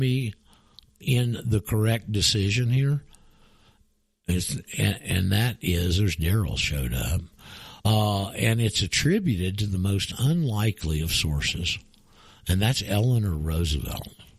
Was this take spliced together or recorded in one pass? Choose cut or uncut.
uncut